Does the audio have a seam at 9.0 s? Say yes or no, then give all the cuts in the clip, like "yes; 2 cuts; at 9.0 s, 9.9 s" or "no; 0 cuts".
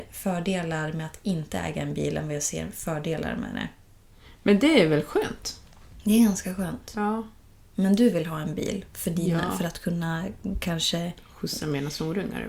no; 0 cuts